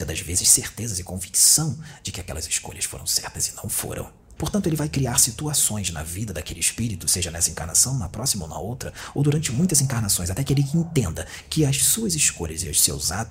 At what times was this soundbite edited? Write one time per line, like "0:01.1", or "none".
0:04.4